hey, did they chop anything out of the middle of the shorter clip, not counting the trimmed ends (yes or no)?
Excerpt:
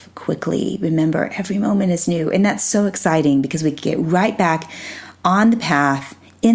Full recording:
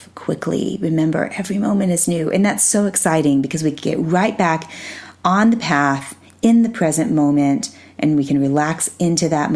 no